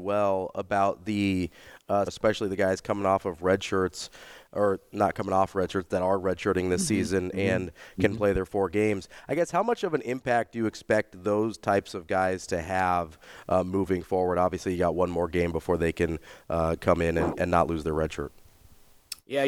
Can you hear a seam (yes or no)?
yes